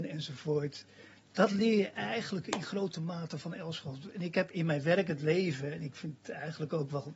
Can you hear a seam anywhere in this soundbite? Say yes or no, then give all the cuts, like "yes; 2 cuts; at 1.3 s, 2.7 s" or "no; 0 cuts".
no; 0 cuts